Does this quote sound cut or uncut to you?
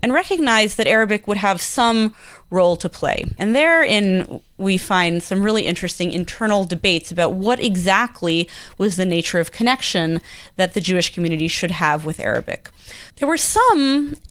cut